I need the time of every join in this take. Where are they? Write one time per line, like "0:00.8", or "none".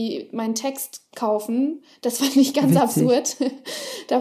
none